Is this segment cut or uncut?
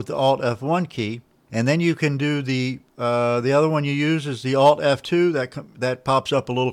uncut